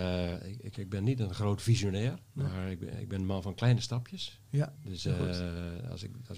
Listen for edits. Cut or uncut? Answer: cut